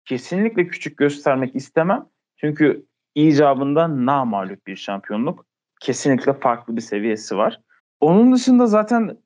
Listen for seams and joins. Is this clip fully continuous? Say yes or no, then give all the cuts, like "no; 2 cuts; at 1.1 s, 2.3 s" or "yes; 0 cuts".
no; 1 cut; at 7.8 s